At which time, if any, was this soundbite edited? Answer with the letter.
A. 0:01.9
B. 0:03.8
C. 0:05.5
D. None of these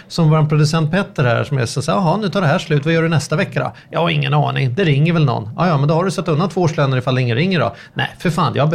D